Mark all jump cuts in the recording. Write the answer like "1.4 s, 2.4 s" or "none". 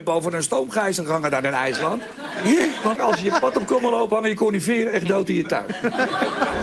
3.0 s